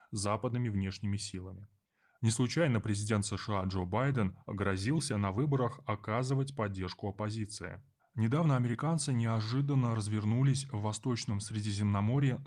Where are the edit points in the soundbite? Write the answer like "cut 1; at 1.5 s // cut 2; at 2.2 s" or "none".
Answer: cut 1; at 4.4 s // cut 2; at 8.0 s